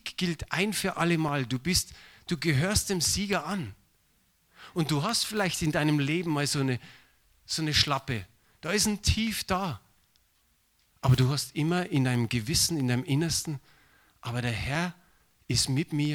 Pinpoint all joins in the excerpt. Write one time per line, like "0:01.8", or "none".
none